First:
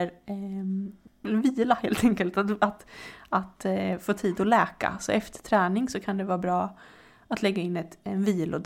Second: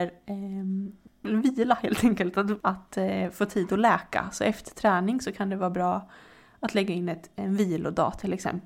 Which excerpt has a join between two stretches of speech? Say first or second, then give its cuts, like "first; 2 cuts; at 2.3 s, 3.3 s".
second; 1 cut; at 2.6 s